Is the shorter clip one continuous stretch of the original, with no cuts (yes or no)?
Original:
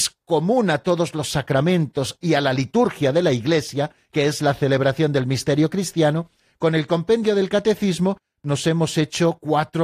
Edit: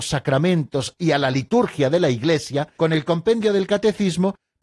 no